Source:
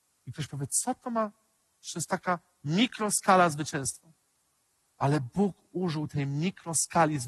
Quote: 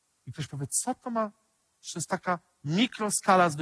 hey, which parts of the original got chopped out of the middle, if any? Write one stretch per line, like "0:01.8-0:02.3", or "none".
none